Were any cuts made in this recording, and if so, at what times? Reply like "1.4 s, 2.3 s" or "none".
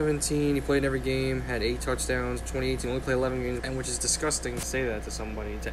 3.6 s, 4.6 s